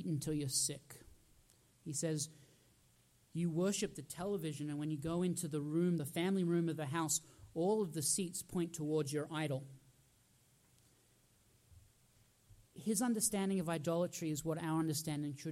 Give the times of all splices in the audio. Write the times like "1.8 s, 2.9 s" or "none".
none

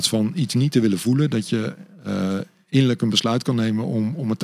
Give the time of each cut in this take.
none

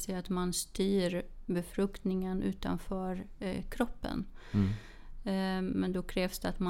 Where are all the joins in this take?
none

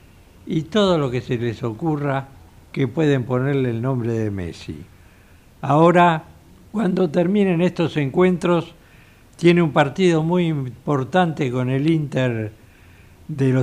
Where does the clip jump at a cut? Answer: 6.7 s

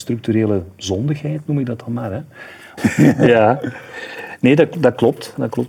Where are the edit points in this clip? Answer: 2.8 s

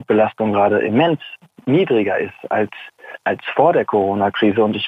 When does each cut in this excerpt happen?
3.2 s

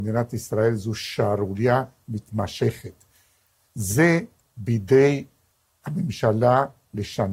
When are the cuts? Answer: 3.6 s

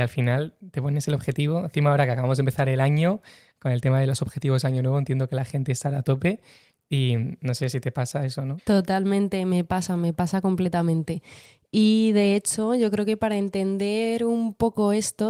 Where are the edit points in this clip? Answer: 8.6 s

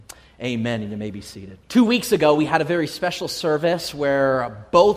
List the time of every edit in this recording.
1.6 s

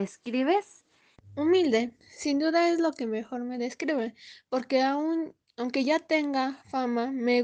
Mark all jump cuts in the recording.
1.1 s

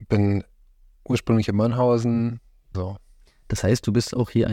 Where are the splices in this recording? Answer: 2.7 s

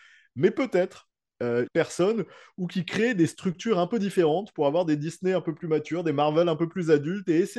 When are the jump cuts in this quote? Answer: 1.7 s

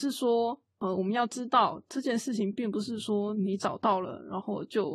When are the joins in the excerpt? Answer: none

